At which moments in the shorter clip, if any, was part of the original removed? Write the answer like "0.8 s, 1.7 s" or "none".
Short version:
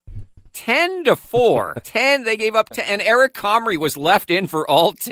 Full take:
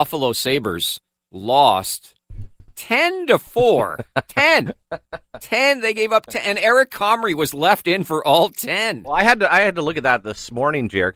1.8 s